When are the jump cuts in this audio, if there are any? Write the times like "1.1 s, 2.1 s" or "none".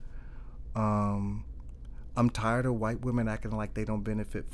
none